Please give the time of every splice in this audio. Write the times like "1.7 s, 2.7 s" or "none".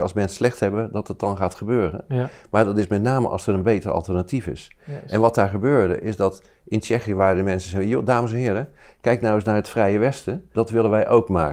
10.5 s